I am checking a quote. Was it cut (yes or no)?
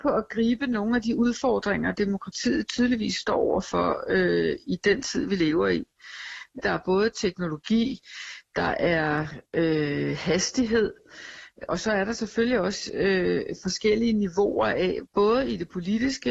yes